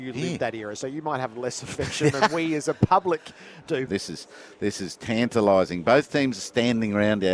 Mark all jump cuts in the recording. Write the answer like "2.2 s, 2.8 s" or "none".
3.9 s